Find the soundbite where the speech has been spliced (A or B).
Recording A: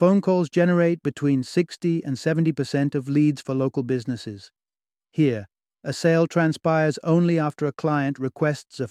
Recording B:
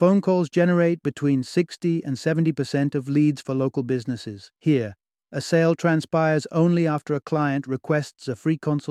B